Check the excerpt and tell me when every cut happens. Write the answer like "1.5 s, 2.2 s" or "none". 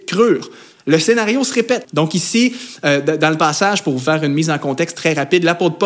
1.8 s